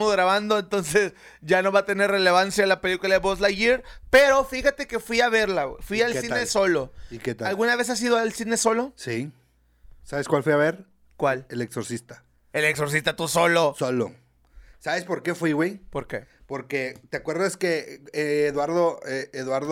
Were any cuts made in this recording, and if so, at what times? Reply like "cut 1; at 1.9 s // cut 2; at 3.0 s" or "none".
none